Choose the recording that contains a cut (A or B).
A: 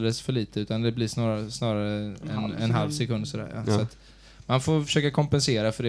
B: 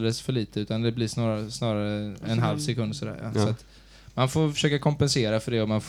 B